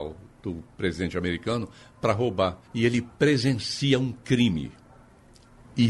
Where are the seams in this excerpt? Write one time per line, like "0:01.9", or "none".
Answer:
0:02.7